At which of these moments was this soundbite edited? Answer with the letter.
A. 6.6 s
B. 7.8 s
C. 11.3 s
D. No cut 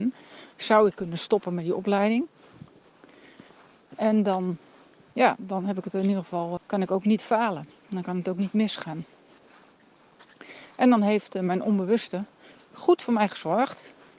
A